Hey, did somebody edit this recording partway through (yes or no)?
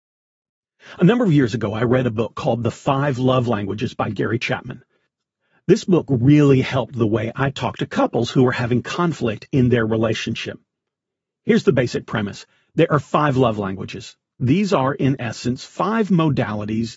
no